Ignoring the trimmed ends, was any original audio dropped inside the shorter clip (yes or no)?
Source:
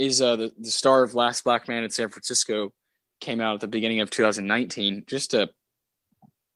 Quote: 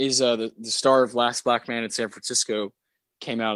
no